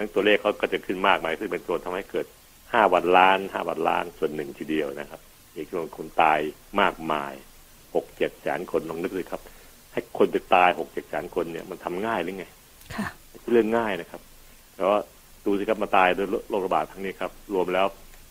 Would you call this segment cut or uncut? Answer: uncut